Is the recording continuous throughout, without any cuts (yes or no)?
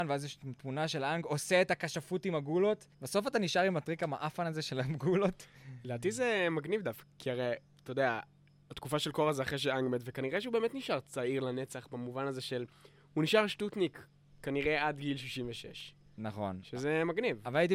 no